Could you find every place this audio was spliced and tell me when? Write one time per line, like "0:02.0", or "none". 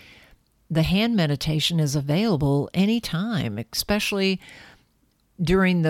none